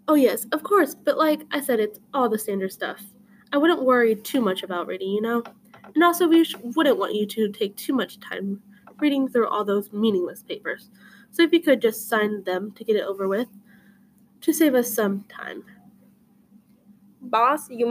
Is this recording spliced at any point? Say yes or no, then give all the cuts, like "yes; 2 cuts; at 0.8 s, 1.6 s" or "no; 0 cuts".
no; 0 cuts